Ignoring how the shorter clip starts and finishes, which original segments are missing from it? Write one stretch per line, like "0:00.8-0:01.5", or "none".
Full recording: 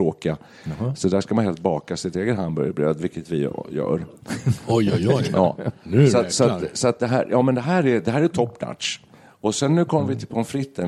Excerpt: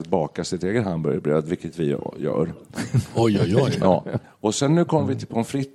0:05.8-0:09.2